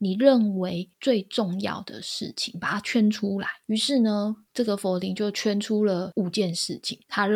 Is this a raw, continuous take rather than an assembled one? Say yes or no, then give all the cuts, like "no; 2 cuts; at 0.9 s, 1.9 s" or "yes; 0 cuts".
yes; 0 cuts